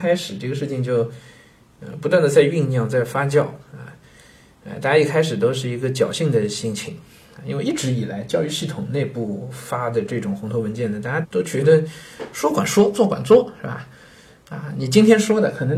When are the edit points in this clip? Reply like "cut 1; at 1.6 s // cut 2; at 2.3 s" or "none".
cut 1; at 11.2 s

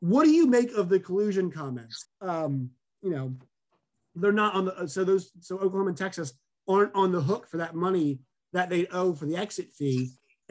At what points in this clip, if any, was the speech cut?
cut 1; at 2.0 s

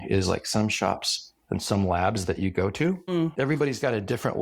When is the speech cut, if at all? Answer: none

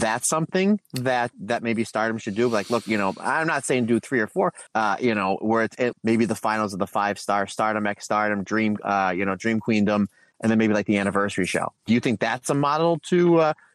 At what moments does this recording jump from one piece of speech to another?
cut 1; at 1.3 s // cut 2; at 4.7 s // cut 3; at 5.9 s

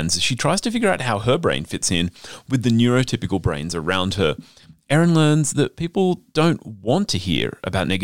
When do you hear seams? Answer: none

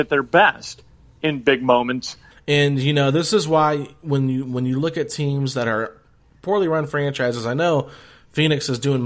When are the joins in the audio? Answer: cut 1; at 2.3 s

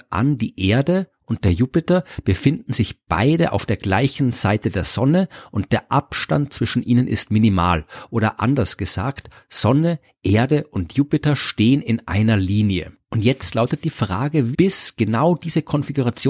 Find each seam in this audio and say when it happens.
cut 1; at 14.5 s

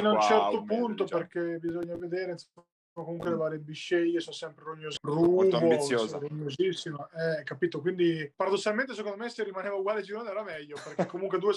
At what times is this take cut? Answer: cut 1; at 5.0 s // cut 2; at 8.3 s

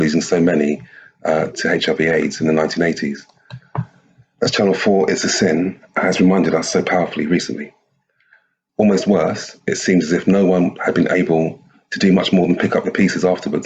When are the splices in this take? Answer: cut 1; at 8.7 s

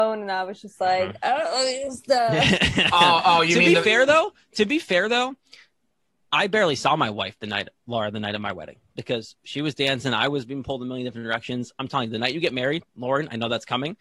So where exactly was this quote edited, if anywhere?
none

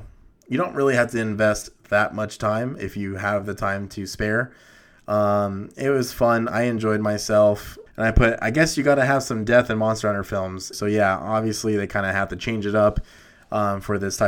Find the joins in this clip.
cut 1; at 7.9 s // cut 2; at 10.7 s

